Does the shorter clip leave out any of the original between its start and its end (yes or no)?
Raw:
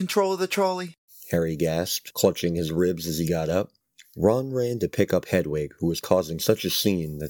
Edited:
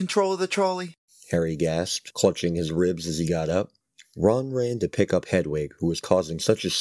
no